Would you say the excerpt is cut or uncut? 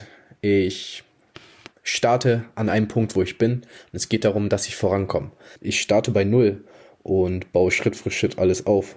cut